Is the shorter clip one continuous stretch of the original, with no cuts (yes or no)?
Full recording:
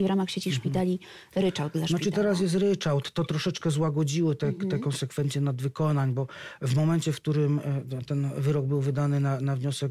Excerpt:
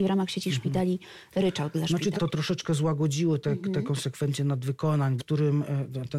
no